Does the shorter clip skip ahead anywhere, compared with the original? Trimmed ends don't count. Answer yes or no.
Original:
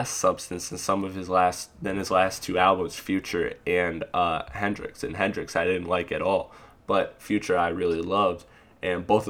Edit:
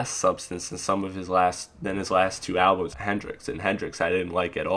yes